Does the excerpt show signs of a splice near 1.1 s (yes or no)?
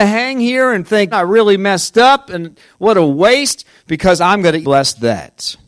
yes